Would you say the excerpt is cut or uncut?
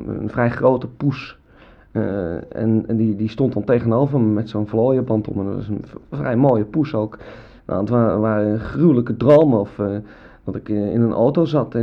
cut